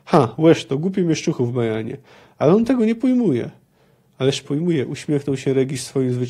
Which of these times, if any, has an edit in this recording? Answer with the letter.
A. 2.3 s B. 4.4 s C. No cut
B